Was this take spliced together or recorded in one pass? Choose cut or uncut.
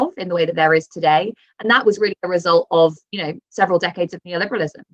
uncut